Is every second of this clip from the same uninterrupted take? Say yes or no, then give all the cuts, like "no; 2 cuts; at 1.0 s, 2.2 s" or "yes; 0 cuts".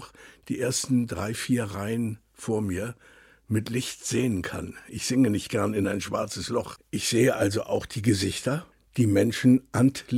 yes; 0 cuts